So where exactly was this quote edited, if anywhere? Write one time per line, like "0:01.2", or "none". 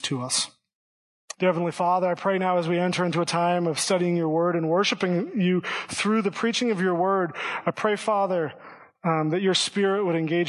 0:01.3